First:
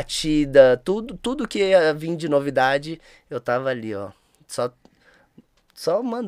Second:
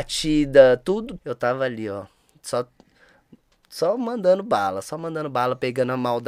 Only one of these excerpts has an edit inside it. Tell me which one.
second; 1 cut; at 1.2 s

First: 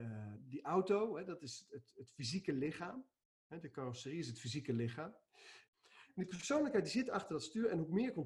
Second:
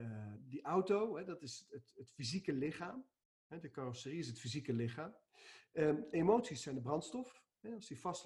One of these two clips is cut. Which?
first; 1 cut; at 5.7 s

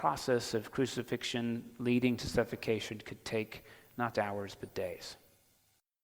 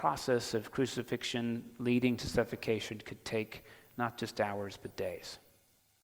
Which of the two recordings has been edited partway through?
first; 1 cut; at 4.1 s

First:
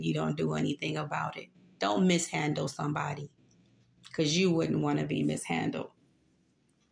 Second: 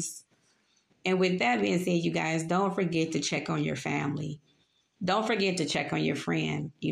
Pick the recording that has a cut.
second; 1 cut; at 0.9 s

